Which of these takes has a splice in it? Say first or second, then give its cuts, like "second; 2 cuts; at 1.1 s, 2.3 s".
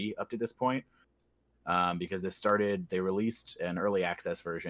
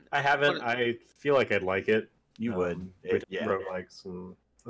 second; 1 cut; at 3.2 s